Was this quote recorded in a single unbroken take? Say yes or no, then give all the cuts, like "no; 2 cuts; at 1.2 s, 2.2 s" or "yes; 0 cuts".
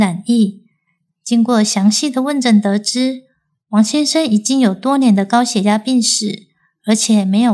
no; 1 cut; at 1.1 s